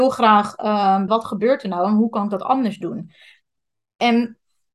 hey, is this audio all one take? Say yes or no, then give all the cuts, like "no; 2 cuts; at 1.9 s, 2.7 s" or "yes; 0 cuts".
no; 1 cut; at 1.1 s